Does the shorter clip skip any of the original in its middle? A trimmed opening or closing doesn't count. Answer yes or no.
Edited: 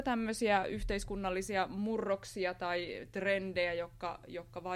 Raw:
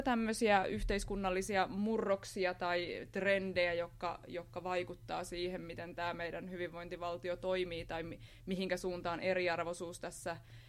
no